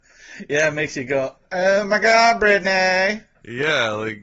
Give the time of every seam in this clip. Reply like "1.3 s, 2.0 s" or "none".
none

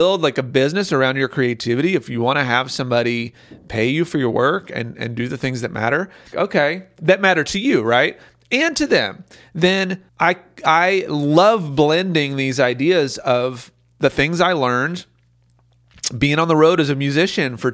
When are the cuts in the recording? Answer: 6.3 s, 10.1 s

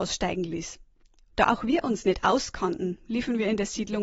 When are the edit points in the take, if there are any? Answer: 1.3 s

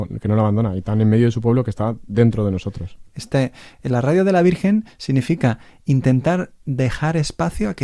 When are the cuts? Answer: 3.1 s, 6.6 s

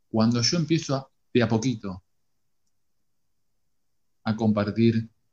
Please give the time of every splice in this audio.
none

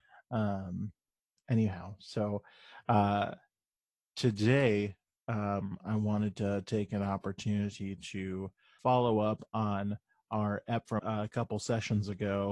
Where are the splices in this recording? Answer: 8.8 s, 11.0 s

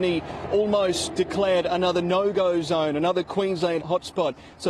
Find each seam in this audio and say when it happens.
3.8 s

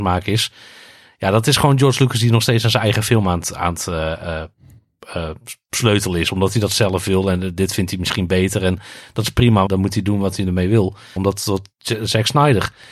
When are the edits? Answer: 9.7 s, 11.2 s

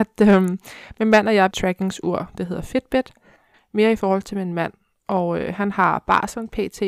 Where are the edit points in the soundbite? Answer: 1.5 s, 3.5 s

